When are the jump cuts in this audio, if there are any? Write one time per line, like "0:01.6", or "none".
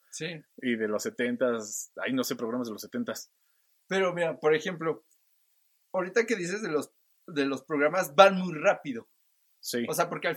none